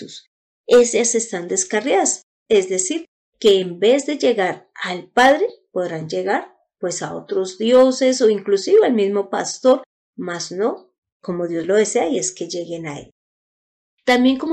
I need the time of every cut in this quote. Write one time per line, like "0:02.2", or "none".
none